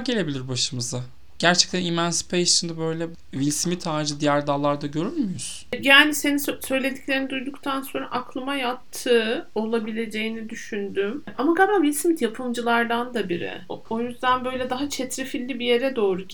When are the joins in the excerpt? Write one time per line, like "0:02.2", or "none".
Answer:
0:13.8